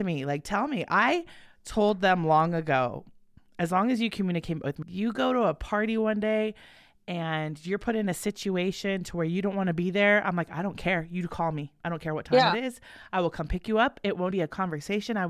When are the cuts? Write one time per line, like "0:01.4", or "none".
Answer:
0:04.8
0:14.3